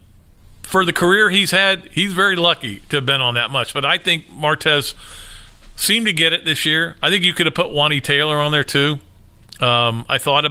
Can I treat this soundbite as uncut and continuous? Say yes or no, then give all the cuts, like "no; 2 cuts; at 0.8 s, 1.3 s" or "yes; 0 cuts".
yes; 0 cuts